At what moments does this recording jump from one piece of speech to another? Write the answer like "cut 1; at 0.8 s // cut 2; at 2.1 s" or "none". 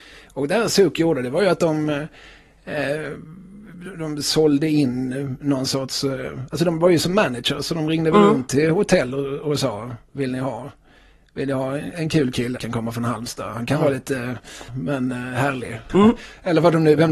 cut 1; at 12.6 s // cut 2; at 14.7 s // cut 3; at 15.9 s

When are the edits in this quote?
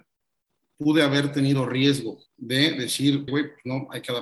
cut 1; at 2.3 s // cut 2; at 3.3 s

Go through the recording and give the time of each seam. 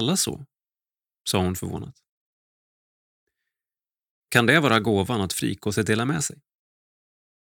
none

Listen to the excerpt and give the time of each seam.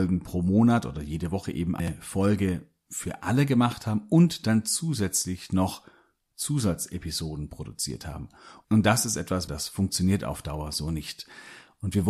cut 1; at 9.5 s

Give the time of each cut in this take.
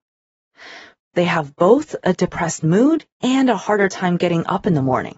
cut 1; at 1.0 s // cut 2; at 3.1 s

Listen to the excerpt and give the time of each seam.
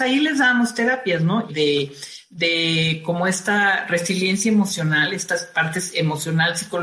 cut 1; at 1.5 s

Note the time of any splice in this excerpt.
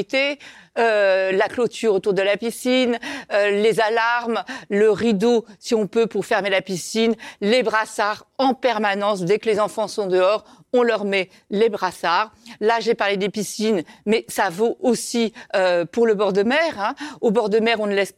none

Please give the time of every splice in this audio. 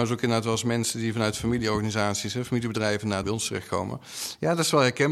cut 1; at 3.2 s

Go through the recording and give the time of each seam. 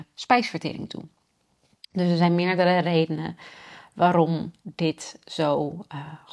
none

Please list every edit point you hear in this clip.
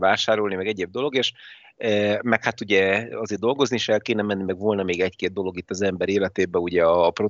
none

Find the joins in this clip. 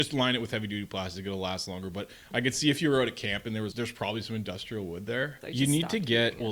cut 1; at 3.7 s // cut 2; at 5.4 s

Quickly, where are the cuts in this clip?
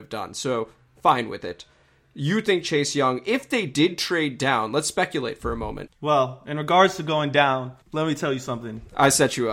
cut 1; at 5.9 s // cut 2; at 7.8 s

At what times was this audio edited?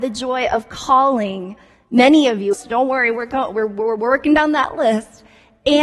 cut 1; at 2.5 s

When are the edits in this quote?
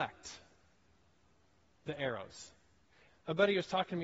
cut 1; at 3.1 s

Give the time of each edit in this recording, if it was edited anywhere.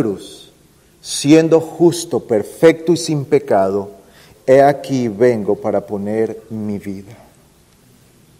cut 1; at 4.3 s

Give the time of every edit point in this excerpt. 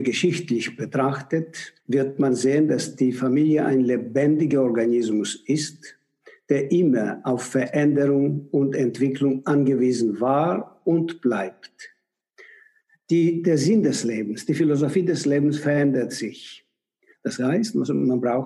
cut 1; at 1.8 s // cut 2; at 17.1 s

